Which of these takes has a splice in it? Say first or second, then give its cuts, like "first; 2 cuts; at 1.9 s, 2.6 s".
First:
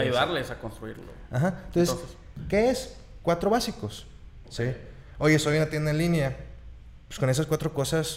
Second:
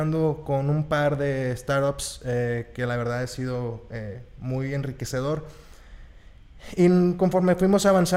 first; 1 cut; at 4.4 s